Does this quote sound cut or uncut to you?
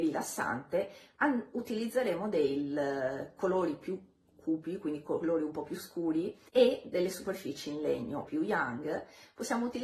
cut